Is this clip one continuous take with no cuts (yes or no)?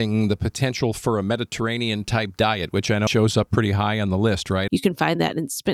no